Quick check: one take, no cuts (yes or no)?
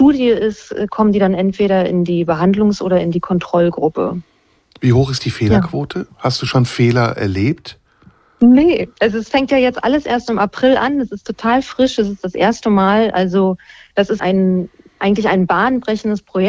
no